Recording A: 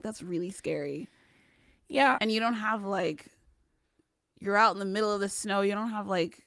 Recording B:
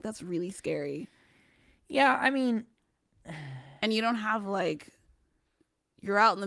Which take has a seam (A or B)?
A